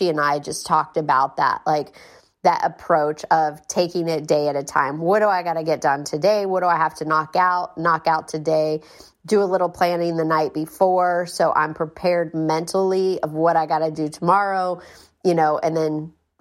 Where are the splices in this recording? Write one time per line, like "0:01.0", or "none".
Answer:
none